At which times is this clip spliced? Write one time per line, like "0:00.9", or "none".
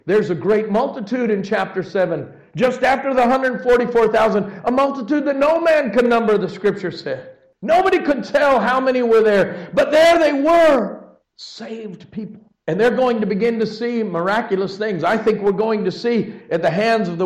none